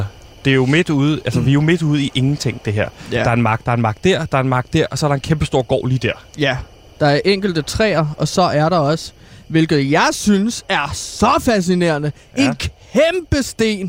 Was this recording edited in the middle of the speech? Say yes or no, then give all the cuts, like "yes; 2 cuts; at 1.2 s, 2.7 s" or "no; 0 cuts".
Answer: yes; 1 cut; at 3.6 s